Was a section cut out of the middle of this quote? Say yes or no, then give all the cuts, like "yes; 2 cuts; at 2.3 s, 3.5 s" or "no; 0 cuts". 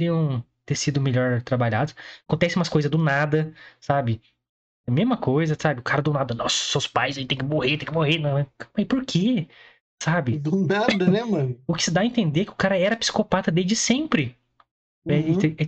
no; 0 cuts